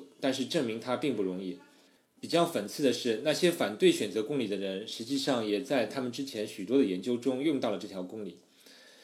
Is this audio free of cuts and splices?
no; 1 cut; at 2.0 s

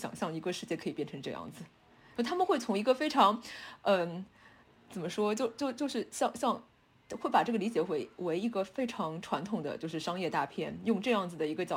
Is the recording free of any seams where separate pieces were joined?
yes; 0 cuts

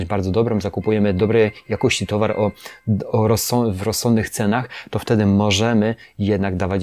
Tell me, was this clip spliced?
no; 0 cuts

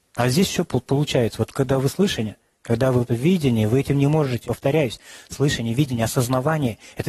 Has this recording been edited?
yes; 2 cuts; at 3.1 s, 4.4 s

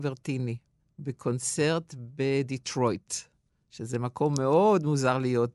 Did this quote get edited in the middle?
no; 0 cuts

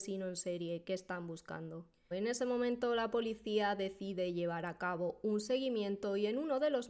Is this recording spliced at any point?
yes; 1 cut; at 2.1 s

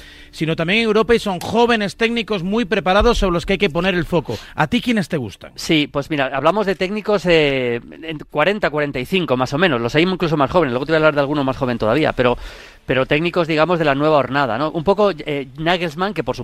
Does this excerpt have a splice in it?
no; 0 cuts

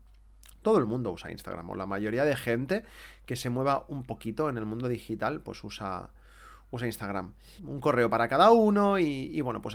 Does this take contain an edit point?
yes; 1 cut; at 7.6 s

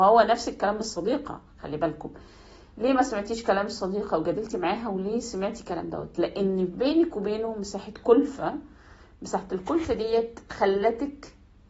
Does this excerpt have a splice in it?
no; 0 cuts

